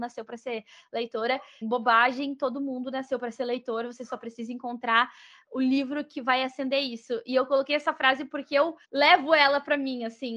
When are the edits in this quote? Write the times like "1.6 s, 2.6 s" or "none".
1.6 s, 8.8 s

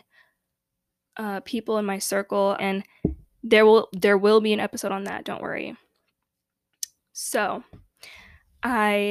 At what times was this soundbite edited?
2.6 s

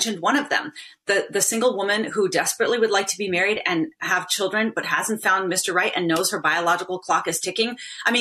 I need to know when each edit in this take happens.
none

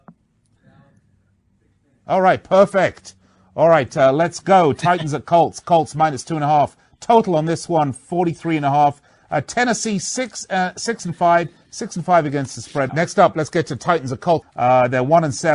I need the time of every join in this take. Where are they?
12.9 s, 14.4 s

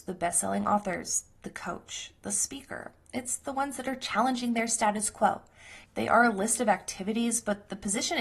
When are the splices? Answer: 5.8 s

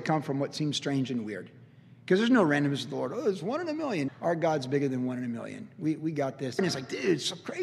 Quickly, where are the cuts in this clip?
4.1 s, 6.6 s

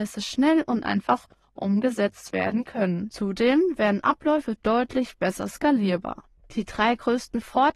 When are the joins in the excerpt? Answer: none

